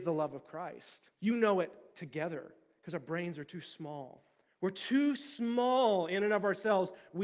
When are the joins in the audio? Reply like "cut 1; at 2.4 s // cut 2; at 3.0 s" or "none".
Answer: cut 1; at 1.1 s